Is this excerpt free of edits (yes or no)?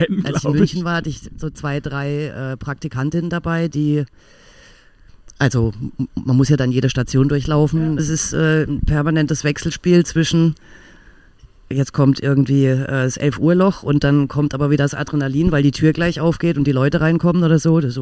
no